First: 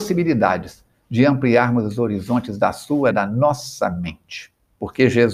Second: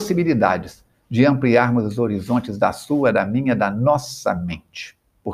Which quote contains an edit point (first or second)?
first